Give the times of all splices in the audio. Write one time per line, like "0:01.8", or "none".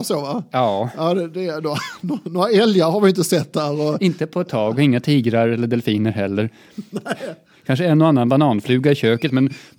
none